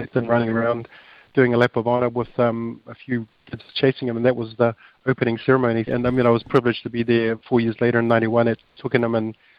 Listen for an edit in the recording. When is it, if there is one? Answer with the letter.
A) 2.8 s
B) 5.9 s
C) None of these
B